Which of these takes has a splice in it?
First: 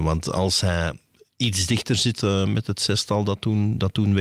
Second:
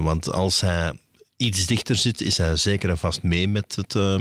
first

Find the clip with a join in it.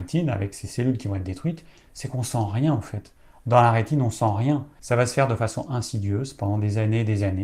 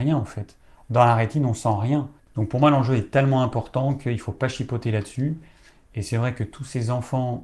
second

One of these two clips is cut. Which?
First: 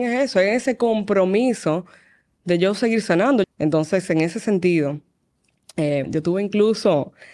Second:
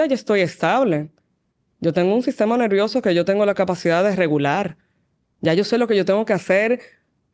first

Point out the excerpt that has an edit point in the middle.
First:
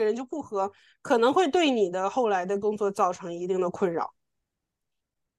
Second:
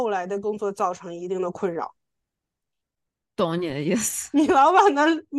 second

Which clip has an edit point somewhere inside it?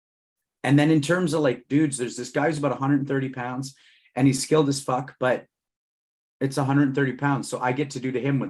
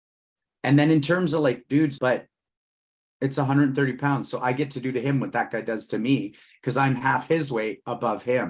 second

